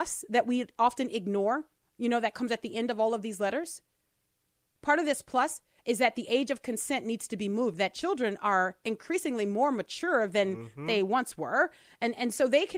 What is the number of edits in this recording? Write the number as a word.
zero